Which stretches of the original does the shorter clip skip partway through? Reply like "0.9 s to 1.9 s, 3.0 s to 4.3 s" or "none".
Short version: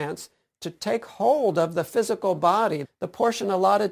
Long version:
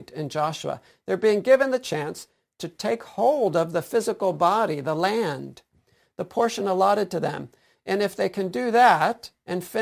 4.8 s to 6.0 s